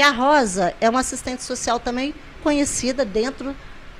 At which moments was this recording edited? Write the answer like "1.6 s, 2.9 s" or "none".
2.4 s